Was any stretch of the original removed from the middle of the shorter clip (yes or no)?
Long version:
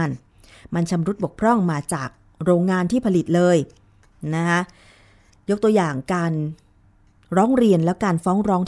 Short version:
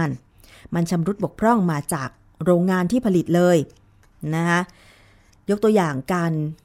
no